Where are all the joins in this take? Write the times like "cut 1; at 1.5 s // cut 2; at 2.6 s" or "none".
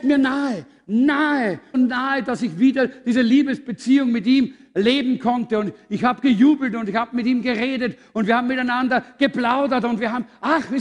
cut 1; at 1.7 s